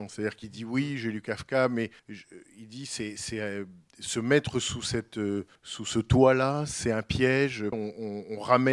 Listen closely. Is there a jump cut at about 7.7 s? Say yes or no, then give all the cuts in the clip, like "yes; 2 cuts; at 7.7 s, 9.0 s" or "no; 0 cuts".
yes; 3 cuts; at 2.0 s, 5.6 s, 7.7 s